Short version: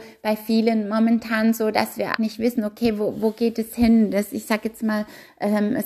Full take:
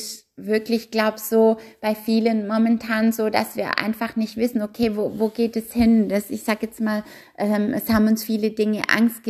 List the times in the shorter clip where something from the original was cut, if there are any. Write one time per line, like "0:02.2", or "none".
0:02.2